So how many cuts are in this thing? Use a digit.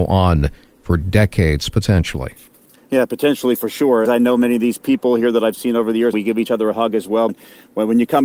3